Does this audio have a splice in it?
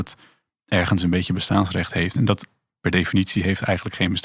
no; 0 cuts

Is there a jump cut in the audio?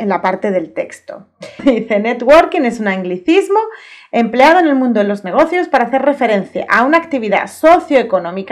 yes; 1 cut; at 1.6 s

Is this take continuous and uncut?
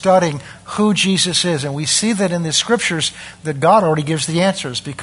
yes; 0 cuts

